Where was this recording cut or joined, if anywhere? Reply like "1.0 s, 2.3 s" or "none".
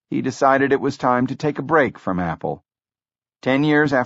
none